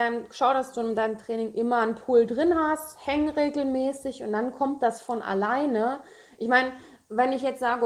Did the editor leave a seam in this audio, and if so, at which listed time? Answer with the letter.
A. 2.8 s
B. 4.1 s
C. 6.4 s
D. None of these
D